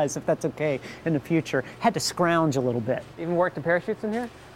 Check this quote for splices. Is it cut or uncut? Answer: uncut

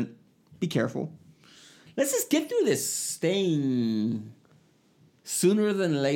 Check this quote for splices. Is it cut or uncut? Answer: uncut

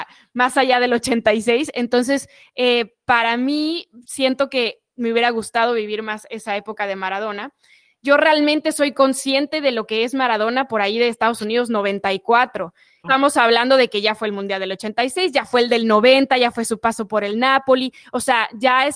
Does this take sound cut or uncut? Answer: cut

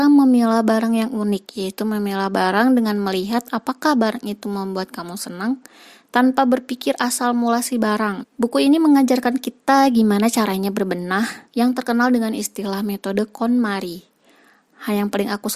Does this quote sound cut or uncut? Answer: cut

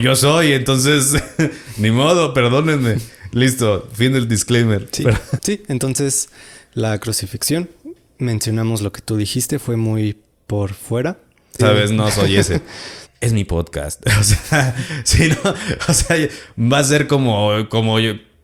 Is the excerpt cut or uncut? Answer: cut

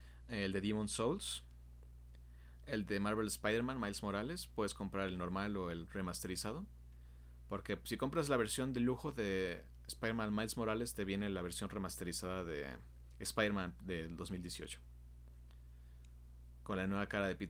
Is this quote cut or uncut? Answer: uncut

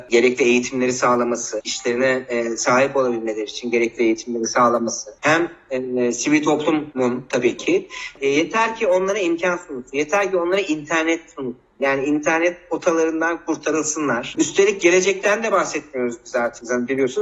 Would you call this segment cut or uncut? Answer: cut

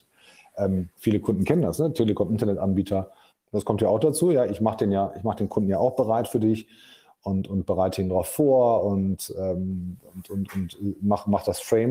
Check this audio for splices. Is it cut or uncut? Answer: cut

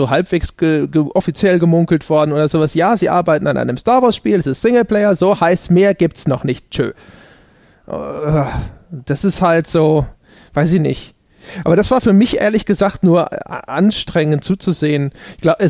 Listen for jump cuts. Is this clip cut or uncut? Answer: uncut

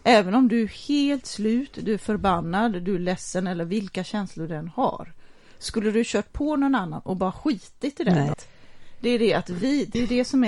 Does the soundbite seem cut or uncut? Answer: cut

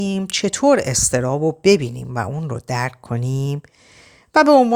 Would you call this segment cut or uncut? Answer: uncut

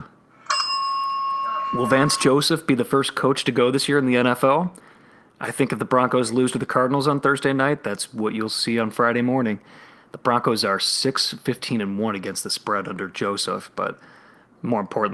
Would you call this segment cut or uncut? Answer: uncut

